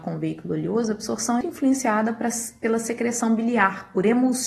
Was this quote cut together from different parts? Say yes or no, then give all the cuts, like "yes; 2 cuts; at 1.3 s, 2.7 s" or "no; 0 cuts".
yes; 1 cut; at 1.4 s